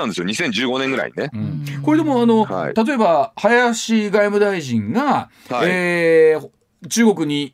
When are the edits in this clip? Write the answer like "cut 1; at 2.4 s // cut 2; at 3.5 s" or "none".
none